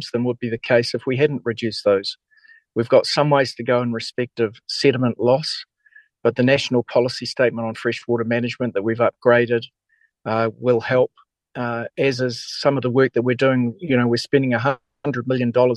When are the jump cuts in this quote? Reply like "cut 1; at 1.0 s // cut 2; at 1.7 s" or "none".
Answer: none